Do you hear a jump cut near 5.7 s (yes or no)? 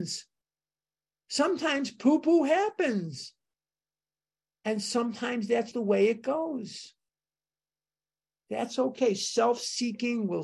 yes